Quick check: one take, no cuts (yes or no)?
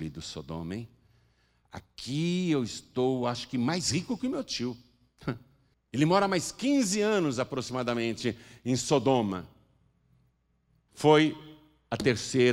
no